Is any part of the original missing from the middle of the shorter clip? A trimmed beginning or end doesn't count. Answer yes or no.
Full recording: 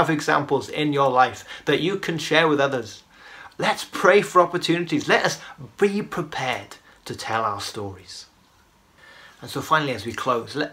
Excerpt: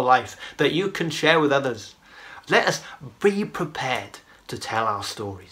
yes